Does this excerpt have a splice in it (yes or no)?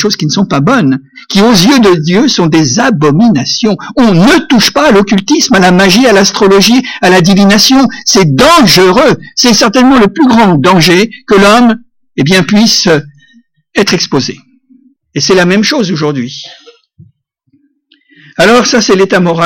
yes